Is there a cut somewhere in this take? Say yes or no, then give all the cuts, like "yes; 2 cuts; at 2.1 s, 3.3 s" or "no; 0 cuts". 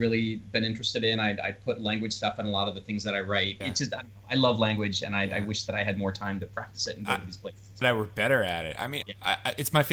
yes; 3 cuts; at 3.6 s, 7.8 s, 9.0 s